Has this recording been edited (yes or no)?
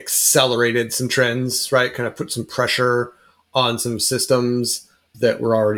no